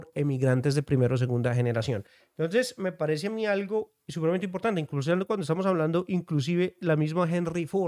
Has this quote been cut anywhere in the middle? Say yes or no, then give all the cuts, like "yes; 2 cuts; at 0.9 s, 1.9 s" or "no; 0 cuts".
no; 0 cuts